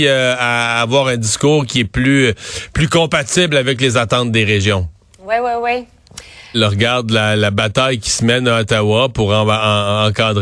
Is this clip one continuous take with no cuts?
no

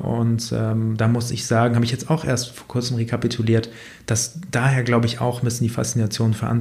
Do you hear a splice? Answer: no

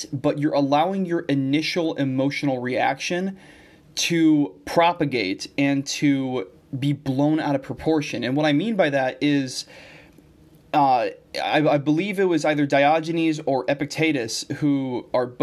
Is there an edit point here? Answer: no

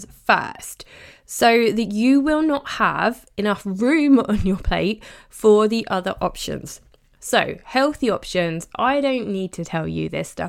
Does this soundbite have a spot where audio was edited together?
no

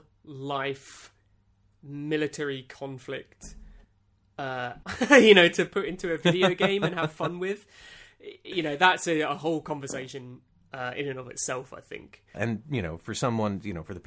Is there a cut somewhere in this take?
yes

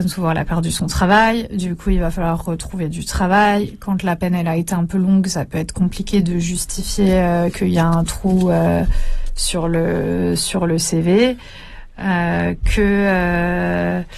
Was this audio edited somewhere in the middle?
no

